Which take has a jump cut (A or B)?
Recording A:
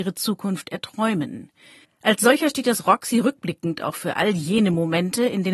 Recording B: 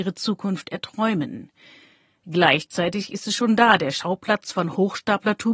A